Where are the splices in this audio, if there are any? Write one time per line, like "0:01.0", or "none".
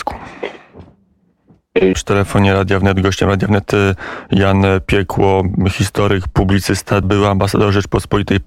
0:01.9
0:07.0